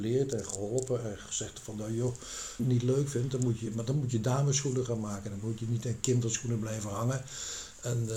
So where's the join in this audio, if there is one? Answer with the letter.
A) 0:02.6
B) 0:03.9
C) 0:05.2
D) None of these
A